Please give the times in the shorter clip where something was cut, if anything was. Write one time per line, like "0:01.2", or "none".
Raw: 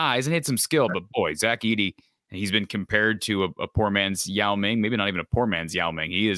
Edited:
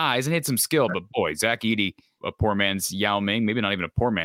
0:02.2